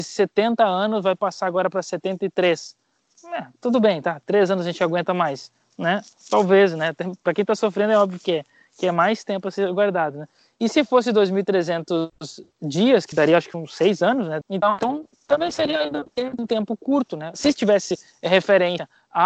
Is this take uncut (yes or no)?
no